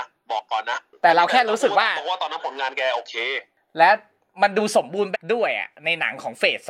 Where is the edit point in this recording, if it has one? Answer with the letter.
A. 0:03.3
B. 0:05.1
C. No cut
B